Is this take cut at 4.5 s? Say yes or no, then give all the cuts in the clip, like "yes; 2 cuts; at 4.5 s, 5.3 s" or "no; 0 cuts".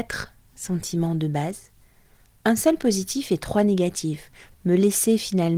yes; 1 cut; at 4.5 s